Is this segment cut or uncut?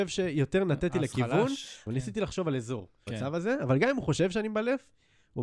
cut